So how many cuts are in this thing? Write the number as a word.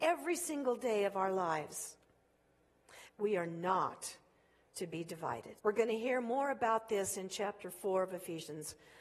two